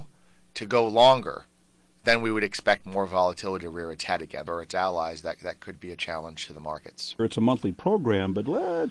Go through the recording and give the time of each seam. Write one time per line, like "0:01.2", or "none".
0:04.5
0:07.2